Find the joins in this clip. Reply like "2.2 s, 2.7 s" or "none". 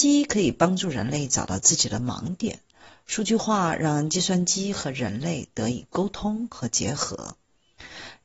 none